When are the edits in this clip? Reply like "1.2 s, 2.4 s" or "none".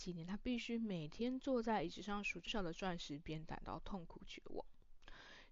2.5 s